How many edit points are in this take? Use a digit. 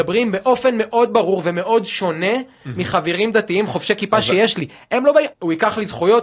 1